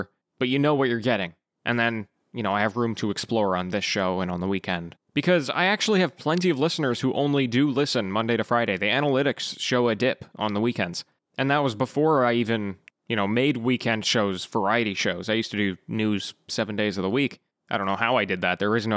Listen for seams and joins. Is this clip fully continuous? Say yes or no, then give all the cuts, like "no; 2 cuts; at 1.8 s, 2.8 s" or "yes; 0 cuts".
yes; 0 cuts